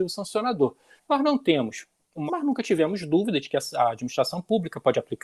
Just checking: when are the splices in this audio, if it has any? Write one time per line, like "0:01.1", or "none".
0:01.0
0:02.3